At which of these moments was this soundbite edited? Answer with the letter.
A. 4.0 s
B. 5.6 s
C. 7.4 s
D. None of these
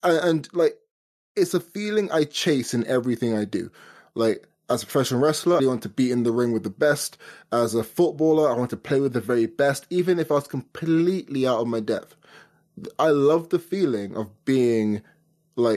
B